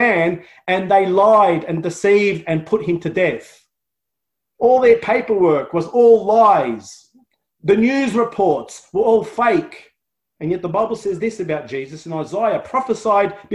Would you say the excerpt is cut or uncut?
cut